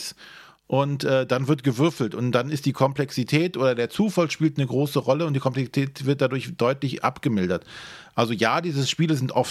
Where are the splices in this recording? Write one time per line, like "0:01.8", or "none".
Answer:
none